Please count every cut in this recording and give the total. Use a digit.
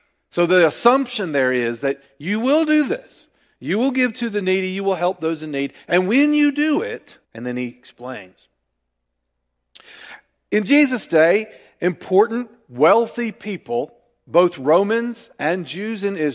1